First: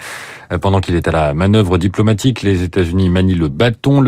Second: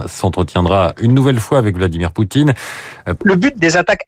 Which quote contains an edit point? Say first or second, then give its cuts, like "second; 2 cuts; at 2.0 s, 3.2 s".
second; 1 cut; at 3.2 s